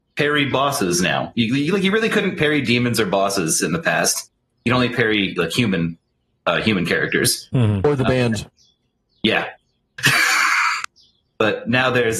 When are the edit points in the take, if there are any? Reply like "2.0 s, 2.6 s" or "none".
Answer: none

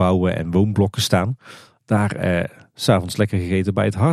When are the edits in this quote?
1.7 s

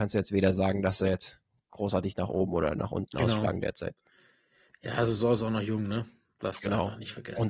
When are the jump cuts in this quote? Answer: none

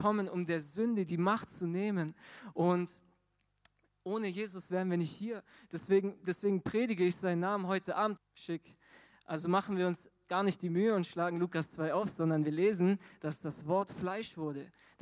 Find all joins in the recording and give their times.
8.2 s

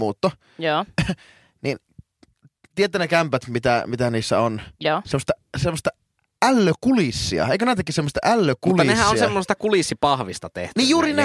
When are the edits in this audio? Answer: none

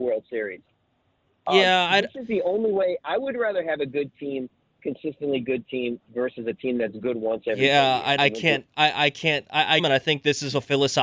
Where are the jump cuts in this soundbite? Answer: 8.2 s, 9.8 s

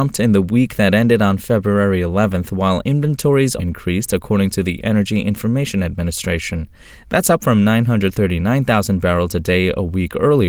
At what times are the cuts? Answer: 3.6 s, 6.9 s

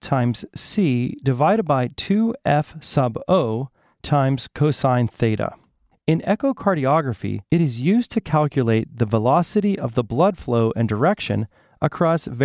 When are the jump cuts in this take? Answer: 5.9 s, 7.4 s

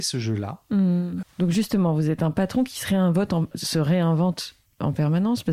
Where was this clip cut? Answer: 1.2 s, 3.5 s

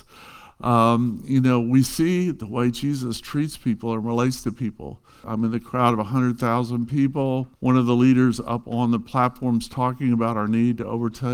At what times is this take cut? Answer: 5.2 s, 7.6 s

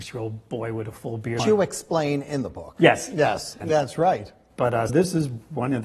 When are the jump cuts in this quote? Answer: 1.4 s, 3.6 s, 4.9 s

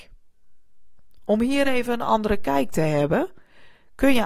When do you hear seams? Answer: none

